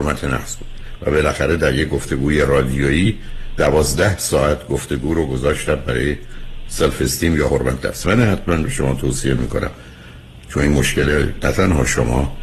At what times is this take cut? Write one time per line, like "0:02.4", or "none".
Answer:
0:08.0